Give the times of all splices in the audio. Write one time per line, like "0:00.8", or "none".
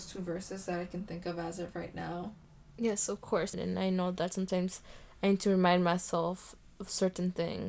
0:03.5